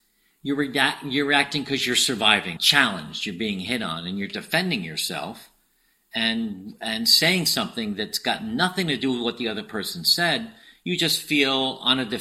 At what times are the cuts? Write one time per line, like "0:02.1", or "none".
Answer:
0:02.6